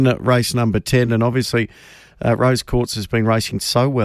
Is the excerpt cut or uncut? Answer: uncut